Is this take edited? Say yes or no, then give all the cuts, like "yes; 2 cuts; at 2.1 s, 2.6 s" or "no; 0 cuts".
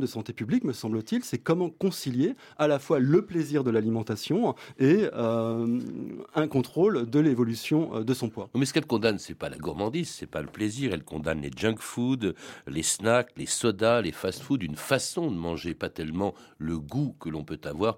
no; 0 cuts